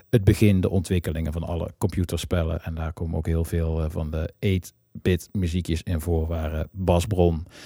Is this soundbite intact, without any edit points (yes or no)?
yes